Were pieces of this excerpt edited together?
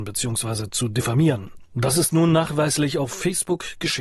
no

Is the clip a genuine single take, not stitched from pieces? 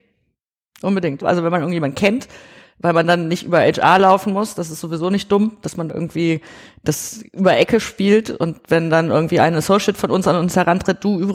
no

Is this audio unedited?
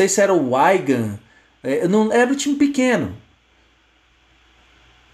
yes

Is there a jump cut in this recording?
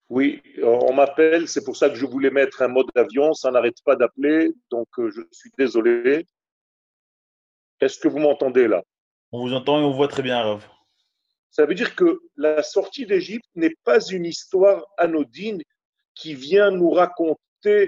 yes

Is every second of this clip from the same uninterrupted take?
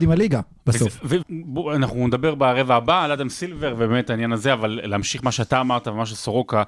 no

